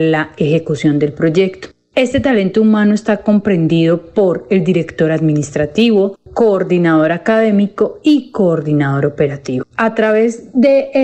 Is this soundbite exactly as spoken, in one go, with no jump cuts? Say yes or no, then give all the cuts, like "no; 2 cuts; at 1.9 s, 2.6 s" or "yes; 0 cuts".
no; 1 cut; at 6.3 s